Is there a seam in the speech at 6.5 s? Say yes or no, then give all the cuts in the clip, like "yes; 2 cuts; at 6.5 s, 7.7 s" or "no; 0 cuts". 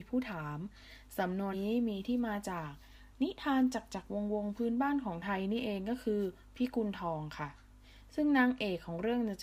no; 1 cut; at 1.5 s